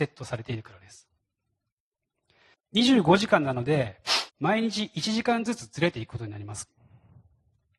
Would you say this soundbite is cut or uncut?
cut